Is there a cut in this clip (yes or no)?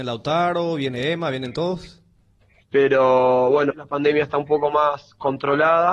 yes